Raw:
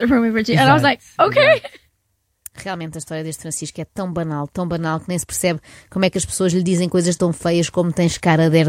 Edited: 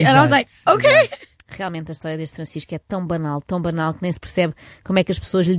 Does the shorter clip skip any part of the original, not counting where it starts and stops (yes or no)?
yes